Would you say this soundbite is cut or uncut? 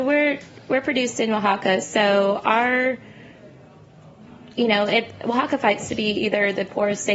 uncut